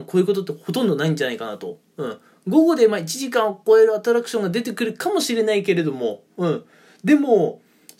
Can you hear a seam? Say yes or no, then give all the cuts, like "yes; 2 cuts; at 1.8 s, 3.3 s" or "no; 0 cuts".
no; 0 cuts